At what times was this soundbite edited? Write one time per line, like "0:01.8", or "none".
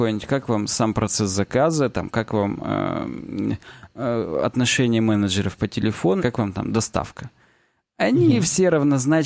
0:06.2